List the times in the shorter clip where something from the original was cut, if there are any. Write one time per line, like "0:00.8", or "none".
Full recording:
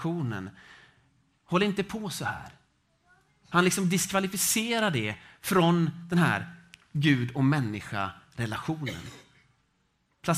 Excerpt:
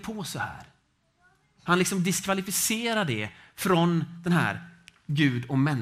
none